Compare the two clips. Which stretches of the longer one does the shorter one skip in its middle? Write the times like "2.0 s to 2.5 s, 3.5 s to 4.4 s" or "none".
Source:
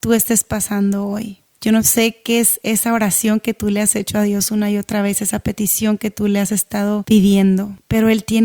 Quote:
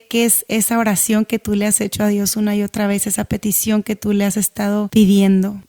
none